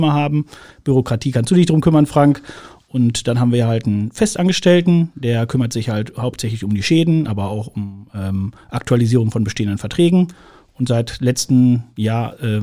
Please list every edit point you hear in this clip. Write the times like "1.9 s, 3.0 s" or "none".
none